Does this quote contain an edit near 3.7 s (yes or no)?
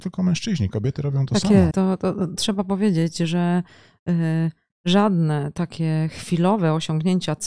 no